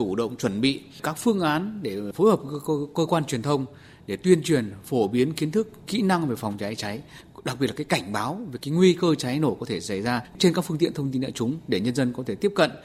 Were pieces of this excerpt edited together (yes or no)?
no